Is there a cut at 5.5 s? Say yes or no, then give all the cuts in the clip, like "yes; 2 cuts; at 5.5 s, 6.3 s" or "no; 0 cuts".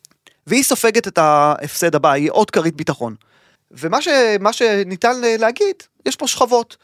no; 1 cut; at 3.6 s